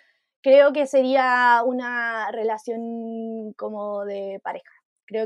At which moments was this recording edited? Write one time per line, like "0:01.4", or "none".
none